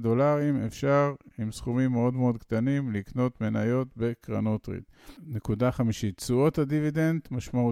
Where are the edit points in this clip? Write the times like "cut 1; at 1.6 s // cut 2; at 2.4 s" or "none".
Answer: none